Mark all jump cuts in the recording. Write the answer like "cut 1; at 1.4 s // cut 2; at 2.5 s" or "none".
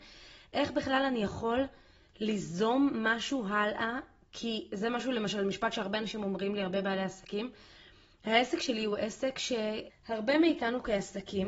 cut 1; at 9.9 s